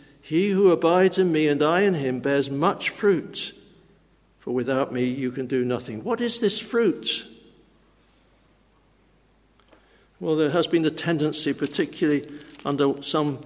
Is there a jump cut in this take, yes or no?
no